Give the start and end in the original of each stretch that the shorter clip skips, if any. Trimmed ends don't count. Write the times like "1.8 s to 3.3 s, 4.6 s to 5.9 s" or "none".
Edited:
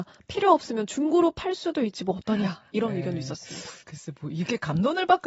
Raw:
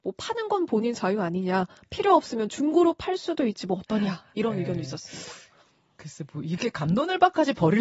5.4 s to 5.9 s